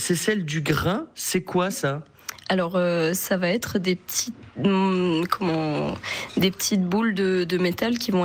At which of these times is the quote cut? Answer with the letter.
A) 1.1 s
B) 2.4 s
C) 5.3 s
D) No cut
D